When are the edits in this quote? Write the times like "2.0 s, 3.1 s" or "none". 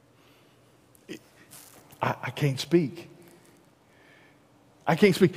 none